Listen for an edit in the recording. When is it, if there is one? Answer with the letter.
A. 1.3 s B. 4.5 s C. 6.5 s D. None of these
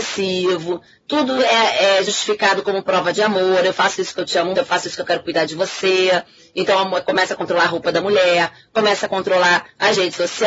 B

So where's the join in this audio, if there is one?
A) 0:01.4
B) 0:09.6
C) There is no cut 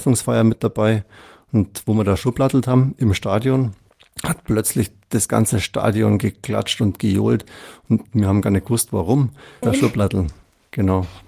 B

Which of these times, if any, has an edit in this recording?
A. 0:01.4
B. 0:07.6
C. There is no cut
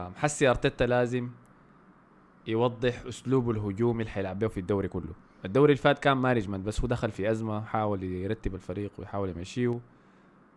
C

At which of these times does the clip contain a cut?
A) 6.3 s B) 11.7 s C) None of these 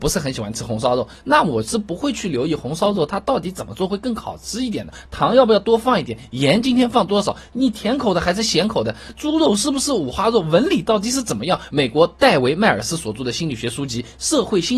B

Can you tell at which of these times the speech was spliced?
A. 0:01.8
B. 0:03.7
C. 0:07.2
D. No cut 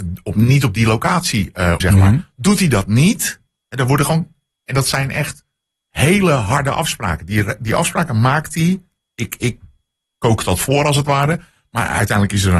A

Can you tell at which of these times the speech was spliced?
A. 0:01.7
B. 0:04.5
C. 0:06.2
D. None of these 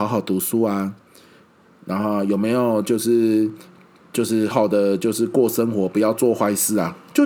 B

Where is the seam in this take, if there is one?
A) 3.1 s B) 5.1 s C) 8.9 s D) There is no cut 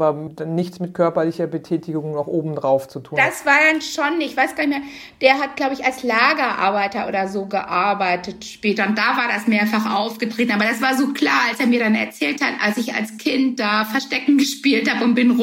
D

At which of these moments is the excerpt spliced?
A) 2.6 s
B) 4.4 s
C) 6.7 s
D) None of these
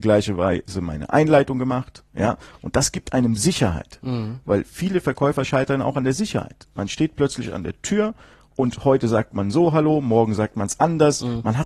D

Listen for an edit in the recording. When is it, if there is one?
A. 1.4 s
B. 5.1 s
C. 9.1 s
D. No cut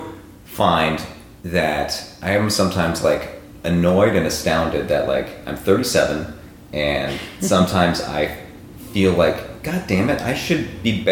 A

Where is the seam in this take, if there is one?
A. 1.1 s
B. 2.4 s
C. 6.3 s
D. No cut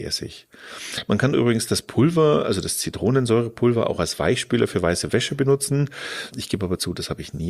C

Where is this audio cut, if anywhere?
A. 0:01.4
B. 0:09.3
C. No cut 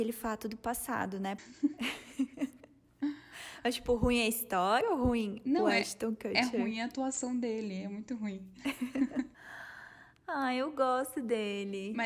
A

